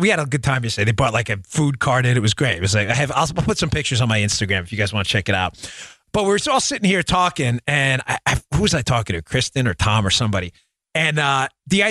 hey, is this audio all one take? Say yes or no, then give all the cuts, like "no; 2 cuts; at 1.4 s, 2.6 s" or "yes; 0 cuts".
yes; 0 cuts